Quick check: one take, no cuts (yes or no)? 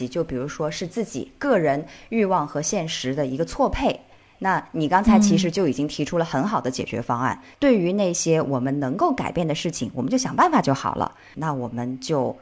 no